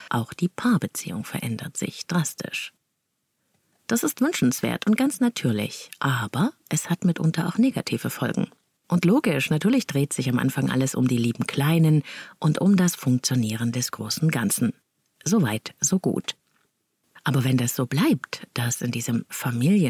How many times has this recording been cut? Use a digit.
1